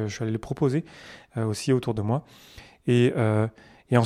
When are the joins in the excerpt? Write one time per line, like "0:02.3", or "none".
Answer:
none